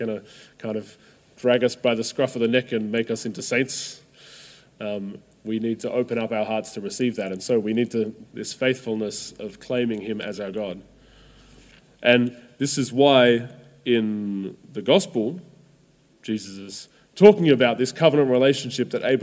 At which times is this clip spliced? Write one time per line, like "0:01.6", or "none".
0:08.2

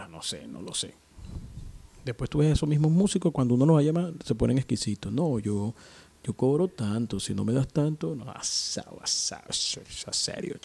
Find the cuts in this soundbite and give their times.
0:09.5

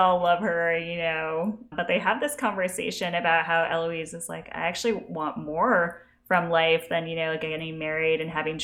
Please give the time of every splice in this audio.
none

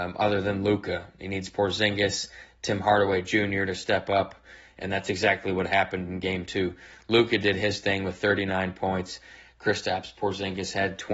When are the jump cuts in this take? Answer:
none

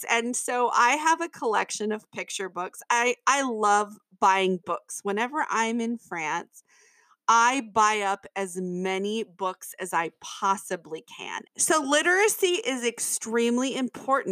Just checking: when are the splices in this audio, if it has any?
0:11.4

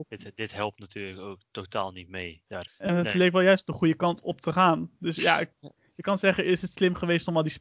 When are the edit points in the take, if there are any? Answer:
0:02.7

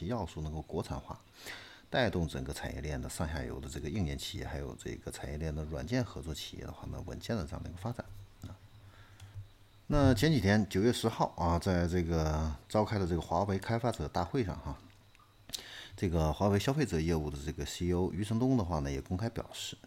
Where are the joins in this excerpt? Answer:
none

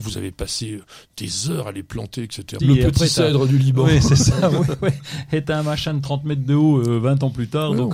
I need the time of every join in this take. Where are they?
0:02.6

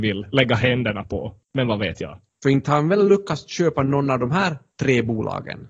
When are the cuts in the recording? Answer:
0:02.4

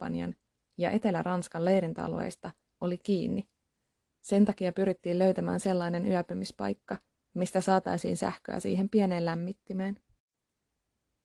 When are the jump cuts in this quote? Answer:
0:04.1

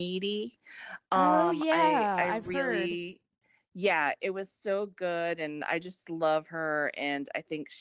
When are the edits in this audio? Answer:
none

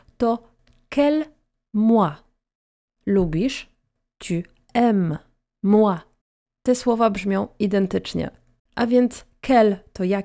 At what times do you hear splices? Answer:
0:05.6
0:08.7

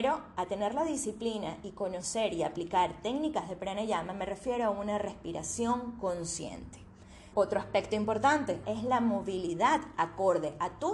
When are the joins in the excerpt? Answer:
0:07.3
0:08.6

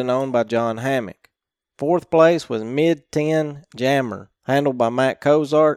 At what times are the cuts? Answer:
0:04.4

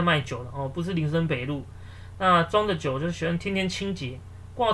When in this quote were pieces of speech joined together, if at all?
0:02.2

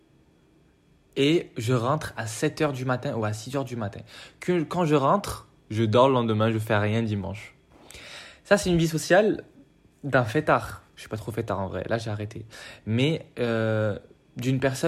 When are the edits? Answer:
none

